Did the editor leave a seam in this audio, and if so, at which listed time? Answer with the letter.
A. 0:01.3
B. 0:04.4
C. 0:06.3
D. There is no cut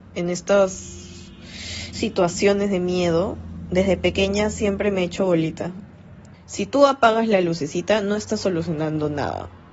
C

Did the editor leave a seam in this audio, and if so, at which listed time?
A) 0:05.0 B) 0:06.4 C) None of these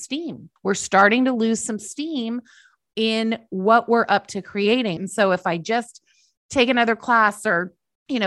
A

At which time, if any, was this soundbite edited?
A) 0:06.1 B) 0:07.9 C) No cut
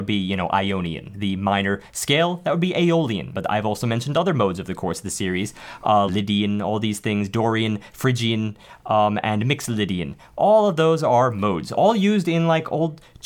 A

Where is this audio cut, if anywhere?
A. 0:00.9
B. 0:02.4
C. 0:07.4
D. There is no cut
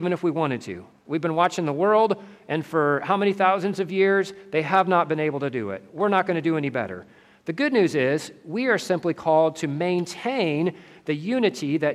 A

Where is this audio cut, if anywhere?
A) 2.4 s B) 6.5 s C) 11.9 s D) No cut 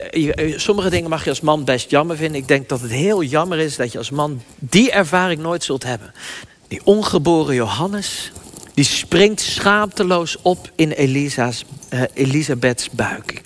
B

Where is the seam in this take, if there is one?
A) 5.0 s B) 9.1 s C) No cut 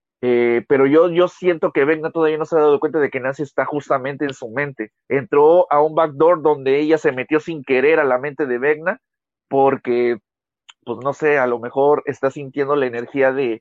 A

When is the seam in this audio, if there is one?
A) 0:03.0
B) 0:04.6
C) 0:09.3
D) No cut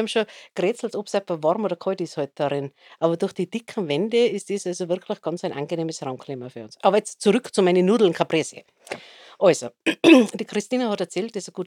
D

